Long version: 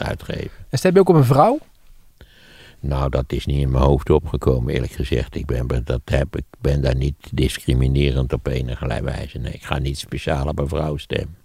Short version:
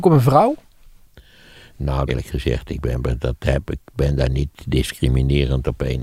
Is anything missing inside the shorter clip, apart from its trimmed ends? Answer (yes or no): yes